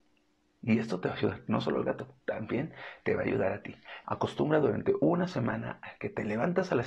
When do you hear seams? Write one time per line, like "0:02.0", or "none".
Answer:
0:04.0